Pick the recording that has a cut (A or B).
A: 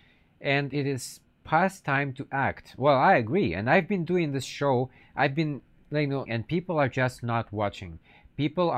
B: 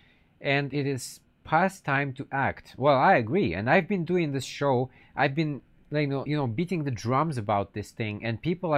A